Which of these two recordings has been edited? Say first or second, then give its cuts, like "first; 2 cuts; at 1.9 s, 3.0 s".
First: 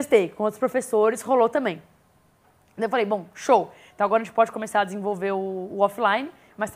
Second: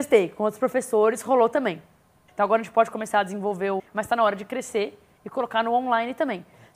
second; 2 cuts; at 2.3 s, 3.8 s